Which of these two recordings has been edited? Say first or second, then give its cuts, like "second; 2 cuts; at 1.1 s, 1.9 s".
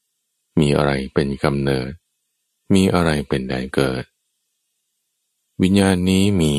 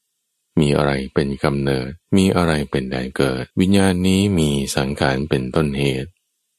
second; 2 cuts; at 2.0 s, 3.5 s